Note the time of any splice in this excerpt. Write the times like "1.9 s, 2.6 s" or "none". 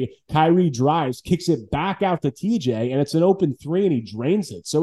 none